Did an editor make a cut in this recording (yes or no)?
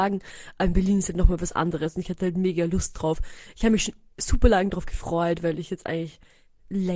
no